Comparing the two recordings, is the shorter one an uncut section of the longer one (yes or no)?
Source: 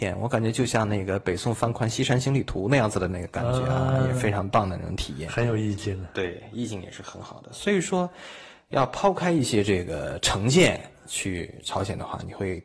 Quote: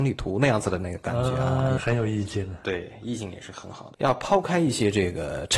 no